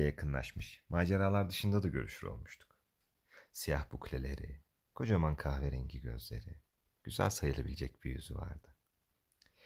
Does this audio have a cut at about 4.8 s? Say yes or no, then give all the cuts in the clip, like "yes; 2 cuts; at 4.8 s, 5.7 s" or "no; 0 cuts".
no; 0 cuts